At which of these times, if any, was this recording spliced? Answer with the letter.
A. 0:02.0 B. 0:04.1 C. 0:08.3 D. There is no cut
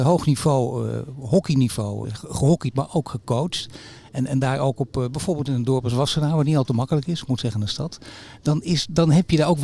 A